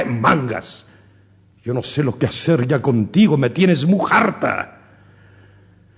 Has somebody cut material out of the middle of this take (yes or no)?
no